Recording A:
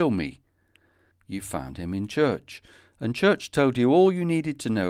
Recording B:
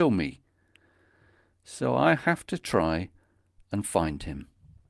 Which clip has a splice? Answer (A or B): A